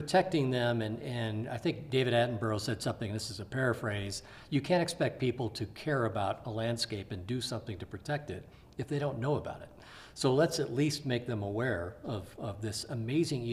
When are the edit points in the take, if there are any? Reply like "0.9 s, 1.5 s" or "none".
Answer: none